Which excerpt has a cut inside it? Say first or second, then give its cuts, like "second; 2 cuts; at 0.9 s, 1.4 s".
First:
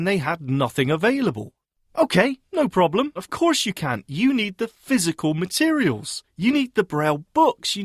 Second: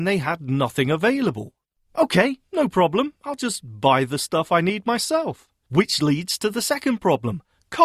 first; 1 cut; at 3.2 s